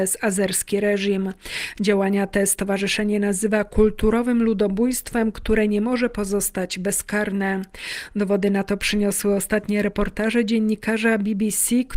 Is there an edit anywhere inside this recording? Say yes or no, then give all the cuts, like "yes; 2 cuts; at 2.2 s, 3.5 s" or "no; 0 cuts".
no; 0 cuts